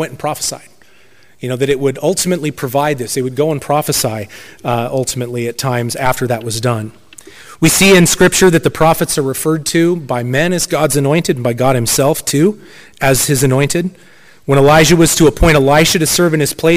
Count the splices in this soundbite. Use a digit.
0